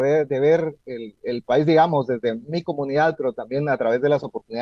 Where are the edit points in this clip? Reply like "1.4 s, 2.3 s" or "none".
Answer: none